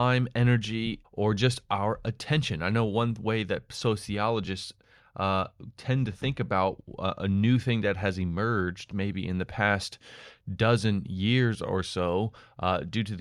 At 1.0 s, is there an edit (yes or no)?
yes